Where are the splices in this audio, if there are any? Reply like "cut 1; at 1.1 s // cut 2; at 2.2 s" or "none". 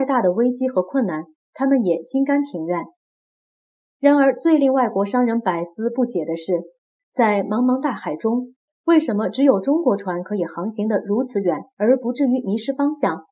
none